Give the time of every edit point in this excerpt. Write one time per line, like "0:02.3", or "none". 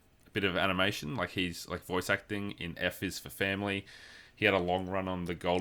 none